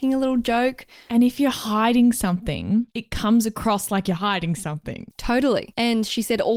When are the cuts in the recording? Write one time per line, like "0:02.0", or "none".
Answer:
0:02.9
0:05.1